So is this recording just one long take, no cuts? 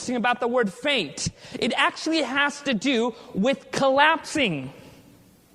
yes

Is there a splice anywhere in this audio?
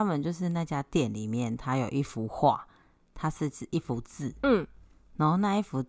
no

